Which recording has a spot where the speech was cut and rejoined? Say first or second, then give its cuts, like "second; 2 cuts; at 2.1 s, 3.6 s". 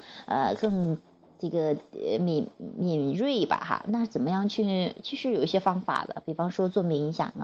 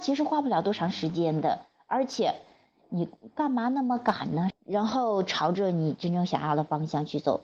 second; 1 cut; at 4.5 s